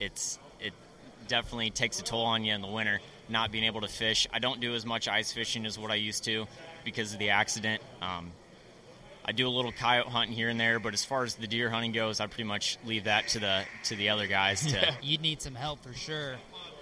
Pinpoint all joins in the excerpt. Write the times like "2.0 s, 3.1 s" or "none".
6.8 s, 15.0 s